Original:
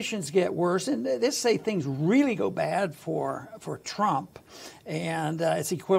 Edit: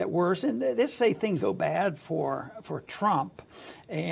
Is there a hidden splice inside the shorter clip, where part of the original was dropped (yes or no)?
yes